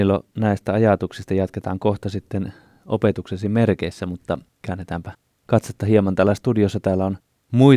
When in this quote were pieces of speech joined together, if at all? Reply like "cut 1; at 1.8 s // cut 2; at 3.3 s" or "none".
none